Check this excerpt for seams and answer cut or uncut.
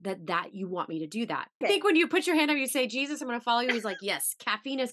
cut